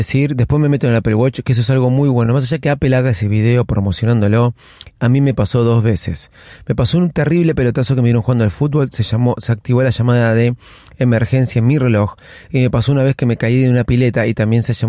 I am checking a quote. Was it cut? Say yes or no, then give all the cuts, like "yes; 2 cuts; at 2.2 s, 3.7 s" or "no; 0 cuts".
no; 0 cuts